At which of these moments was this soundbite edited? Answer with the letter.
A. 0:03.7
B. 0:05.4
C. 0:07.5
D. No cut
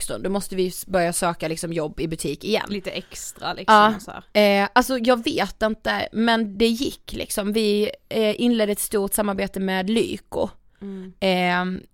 D